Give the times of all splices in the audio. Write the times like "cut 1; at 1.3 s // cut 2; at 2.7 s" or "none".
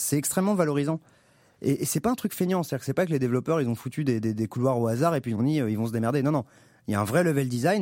none